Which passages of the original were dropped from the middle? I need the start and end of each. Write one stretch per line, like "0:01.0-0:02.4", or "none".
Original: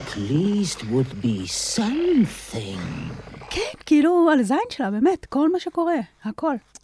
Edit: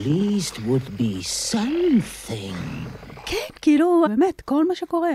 0:04.3-0:04.9